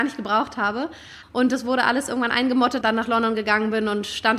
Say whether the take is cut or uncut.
cut